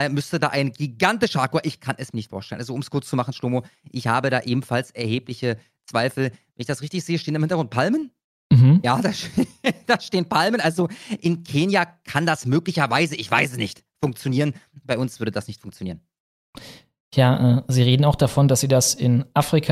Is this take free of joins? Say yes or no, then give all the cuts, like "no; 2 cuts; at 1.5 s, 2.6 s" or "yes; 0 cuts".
yes; 0 cuts